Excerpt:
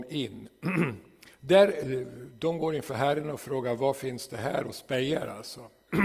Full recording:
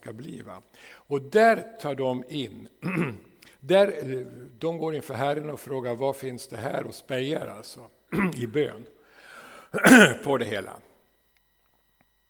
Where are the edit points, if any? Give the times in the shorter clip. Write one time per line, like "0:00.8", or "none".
none